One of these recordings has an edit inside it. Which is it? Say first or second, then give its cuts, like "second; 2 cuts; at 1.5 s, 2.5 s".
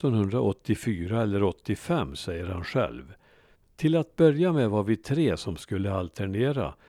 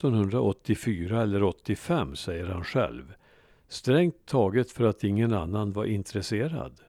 first; 1 cut; at 3.5 s